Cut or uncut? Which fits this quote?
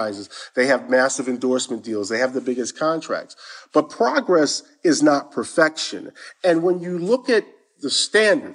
uncut